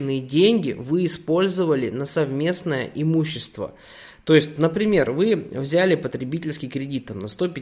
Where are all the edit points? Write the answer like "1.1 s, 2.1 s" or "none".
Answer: none